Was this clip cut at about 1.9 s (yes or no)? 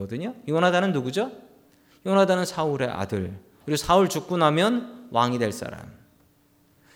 no